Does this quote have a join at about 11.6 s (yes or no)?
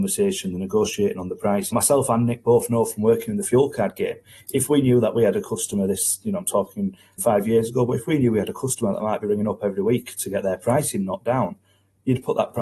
no